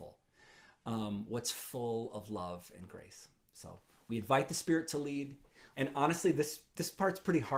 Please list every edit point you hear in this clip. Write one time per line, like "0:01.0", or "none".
0:05.7